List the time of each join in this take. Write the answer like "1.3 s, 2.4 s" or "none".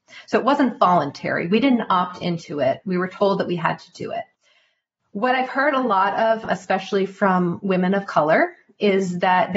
none